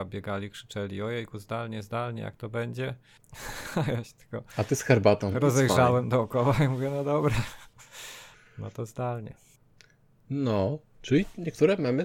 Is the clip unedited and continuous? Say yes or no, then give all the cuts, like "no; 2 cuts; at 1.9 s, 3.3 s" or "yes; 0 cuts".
yes; 0 cuts